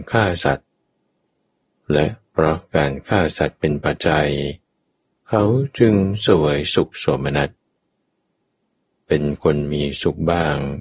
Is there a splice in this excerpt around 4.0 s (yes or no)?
yes